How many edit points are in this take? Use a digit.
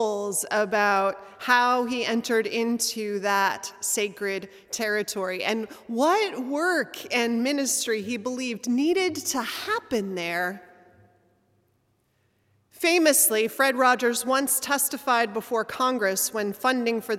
0